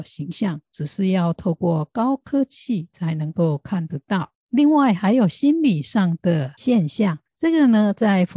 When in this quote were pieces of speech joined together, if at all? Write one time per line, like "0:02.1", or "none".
0:04.4